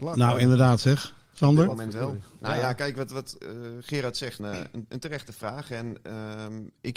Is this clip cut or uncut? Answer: cut